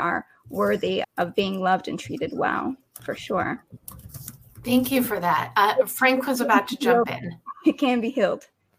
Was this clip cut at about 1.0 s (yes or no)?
yes